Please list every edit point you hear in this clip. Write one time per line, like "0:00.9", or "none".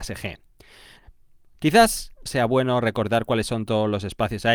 0:02.3